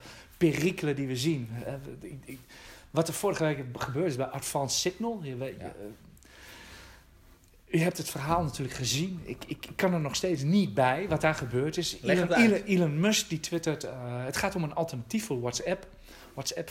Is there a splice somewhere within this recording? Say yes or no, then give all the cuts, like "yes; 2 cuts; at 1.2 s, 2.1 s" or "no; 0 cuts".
no; 0 cuts